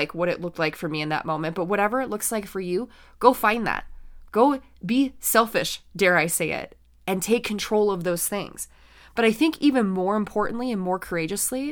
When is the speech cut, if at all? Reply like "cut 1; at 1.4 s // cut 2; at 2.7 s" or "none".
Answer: cut 1; at 4.2 s